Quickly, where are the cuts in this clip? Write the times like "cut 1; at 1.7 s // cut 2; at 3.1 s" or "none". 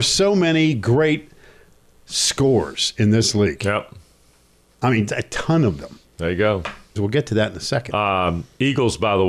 cut 1; at 5.1 s // cut 2; at 7.0 s